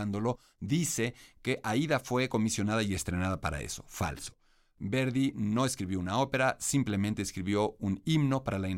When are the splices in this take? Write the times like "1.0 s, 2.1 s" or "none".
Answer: none